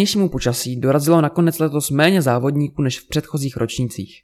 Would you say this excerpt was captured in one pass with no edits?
yes; 0 cuts

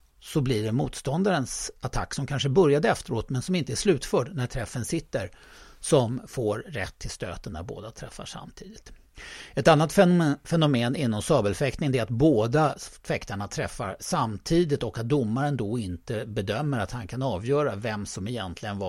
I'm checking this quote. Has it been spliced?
yes; 1 cut; at 14.0 s

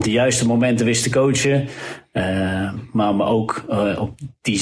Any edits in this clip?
no; 0 cuts

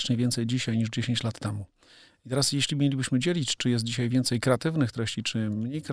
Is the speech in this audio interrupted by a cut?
no; 0 cuts

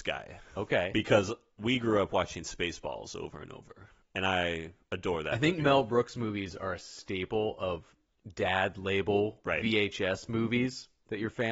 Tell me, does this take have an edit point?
no; 0 cuts

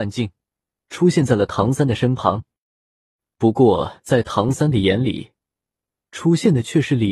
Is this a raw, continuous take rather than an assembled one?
yes; 0 cuts

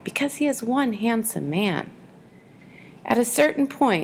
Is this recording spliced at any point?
no; 0 cuts

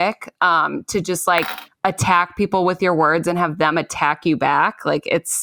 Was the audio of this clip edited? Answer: no; 0 cuts

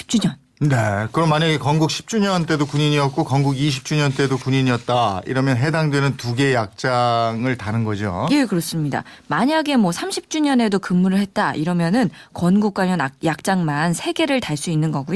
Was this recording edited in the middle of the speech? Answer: no; 0 cuts

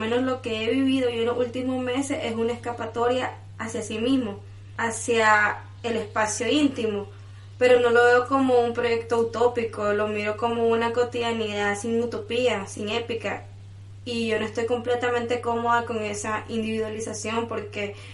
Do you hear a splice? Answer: no; 0 cuts

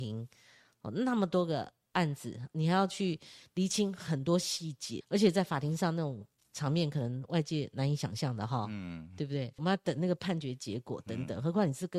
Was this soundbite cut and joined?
yes; 2 cuts; at 5.0 s, 9.6 s

